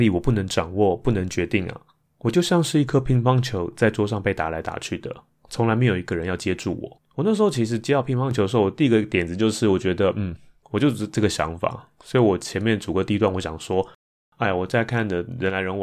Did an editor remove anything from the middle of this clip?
yes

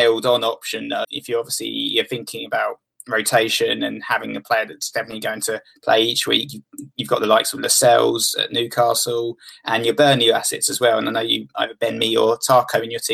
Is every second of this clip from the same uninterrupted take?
no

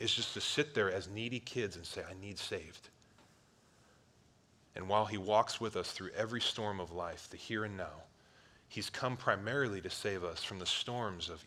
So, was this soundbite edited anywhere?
yes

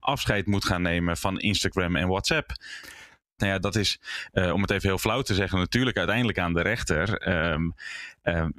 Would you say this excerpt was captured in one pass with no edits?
no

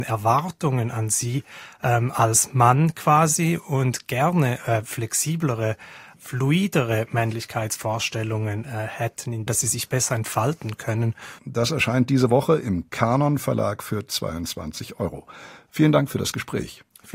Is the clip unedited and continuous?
no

